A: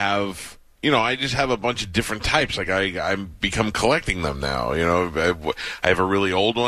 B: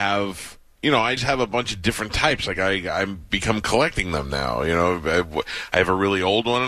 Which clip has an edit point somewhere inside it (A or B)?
B